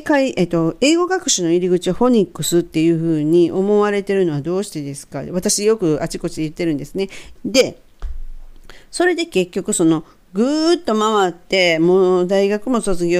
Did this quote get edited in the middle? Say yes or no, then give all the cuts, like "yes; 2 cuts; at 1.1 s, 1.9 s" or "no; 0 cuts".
yes; 1 cut; at 7.4 s